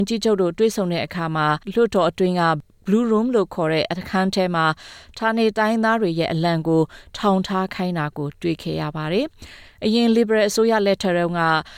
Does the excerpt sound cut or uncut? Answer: cut